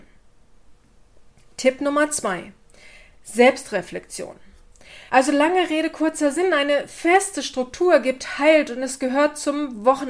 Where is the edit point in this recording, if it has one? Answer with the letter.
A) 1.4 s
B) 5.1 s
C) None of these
B